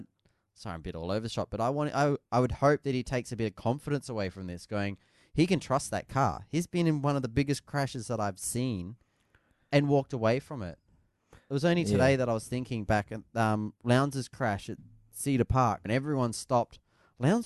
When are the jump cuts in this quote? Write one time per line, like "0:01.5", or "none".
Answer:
0:15.9